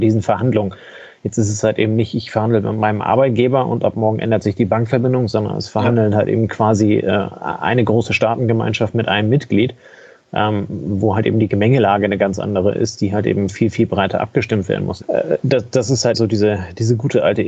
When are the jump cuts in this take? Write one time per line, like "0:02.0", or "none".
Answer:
0:15.0
0:16.1

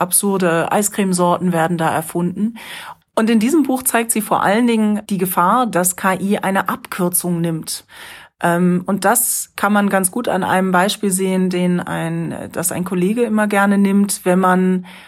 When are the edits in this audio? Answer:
0:03.0
0:05.1

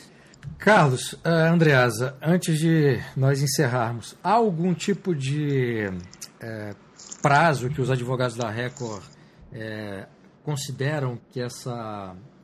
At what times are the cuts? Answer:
0:11.2

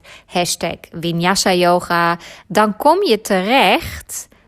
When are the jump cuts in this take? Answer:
0:02.4

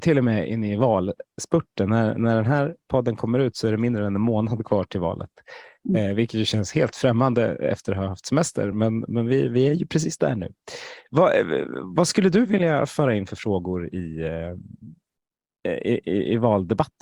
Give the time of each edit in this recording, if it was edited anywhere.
none

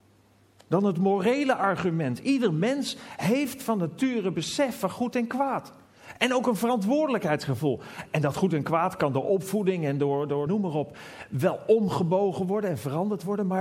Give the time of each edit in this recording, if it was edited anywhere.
0:10.5

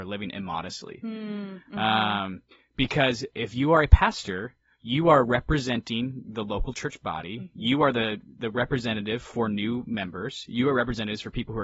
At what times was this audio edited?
none

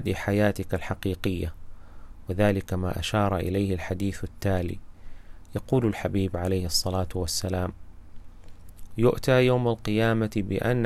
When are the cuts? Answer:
none

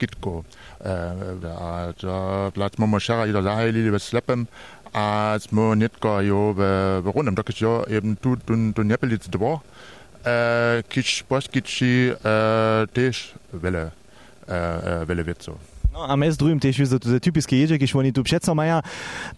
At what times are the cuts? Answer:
0:01.4

